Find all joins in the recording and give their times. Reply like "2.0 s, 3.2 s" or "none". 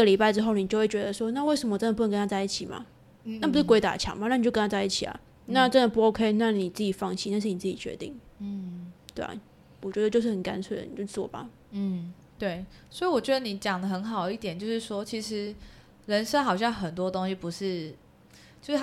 none